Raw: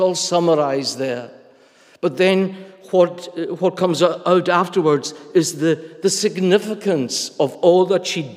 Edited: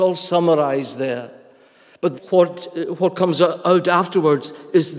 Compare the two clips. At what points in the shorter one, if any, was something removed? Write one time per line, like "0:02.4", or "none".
0:02.2